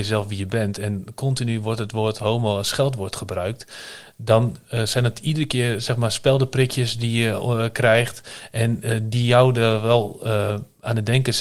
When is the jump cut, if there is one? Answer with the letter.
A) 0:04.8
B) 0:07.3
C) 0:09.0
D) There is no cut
D